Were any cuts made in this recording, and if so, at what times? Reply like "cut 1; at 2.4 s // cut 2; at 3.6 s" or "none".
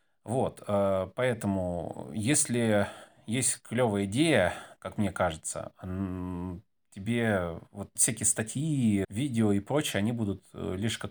cut 1; at 4.8 s // cut 2; at 8.0 s // cut 3; at 9.0 s

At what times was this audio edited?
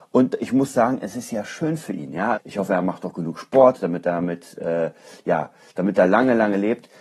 cut 1; at 2.3 s

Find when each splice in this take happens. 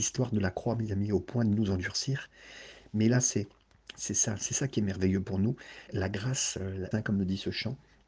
cut 1; at 5.9 s // cut 2; at 6.9 s

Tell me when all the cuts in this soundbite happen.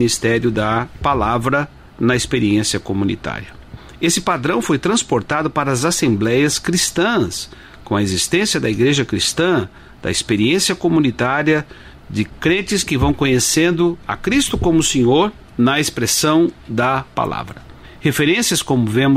none

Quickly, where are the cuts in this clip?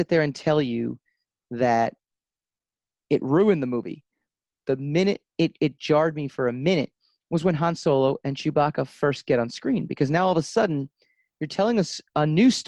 cut 1; at 4.6 s

